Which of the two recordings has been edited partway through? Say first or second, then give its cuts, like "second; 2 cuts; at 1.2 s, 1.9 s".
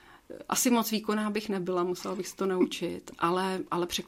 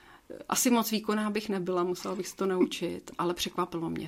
second; 1 cut; at 3.2 s